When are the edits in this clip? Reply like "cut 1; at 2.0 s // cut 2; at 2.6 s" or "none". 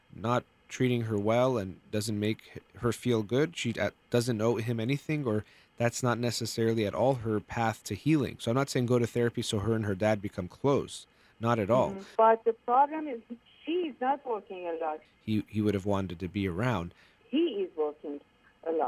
cut 1; at 12.2 s // cut 2; at 15.1 s // cut 3; at 17.2 s